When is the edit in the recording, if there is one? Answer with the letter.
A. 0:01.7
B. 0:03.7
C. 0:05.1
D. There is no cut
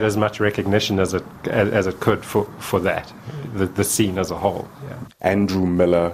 C